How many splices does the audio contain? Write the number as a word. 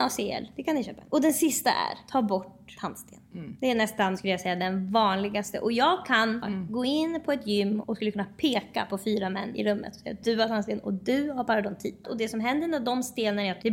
three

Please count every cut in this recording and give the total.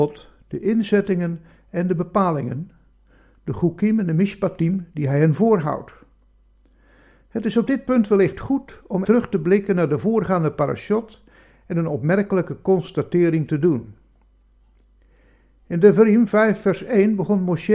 one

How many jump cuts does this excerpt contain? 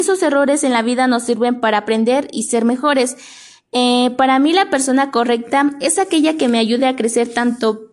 zero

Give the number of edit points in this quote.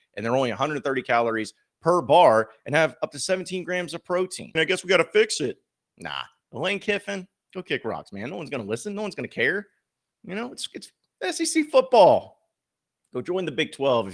three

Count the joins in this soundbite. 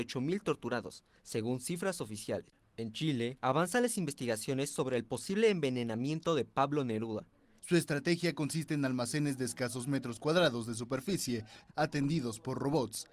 three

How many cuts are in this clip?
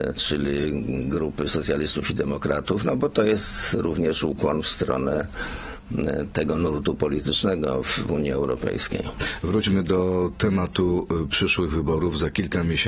zero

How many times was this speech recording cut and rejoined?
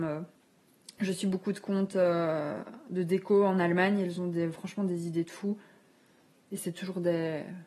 zero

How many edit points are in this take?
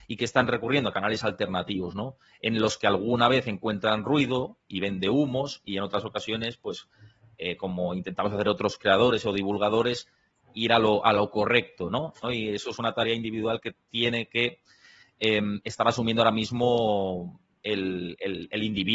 one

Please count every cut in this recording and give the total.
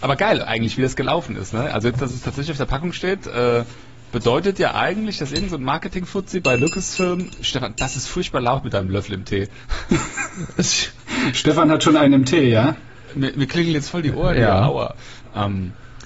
zero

